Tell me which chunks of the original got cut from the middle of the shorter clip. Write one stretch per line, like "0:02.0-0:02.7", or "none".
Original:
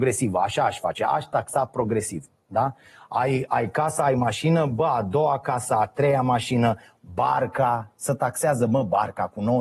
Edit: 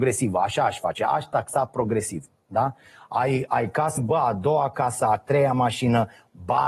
0:04.0-0:04.7